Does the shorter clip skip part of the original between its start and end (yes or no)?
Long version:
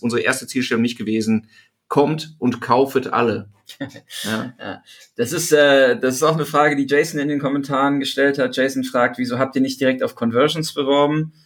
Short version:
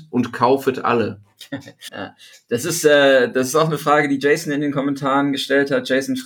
yes